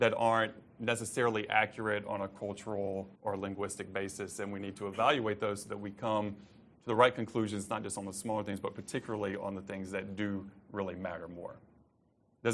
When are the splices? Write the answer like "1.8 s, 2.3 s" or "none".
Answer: 3.2 s